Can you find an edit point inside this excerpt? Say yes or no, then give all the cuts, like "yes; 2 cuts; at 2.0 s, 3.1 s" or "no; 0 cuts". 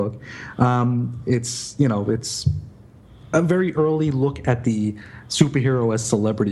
no; 0 cuts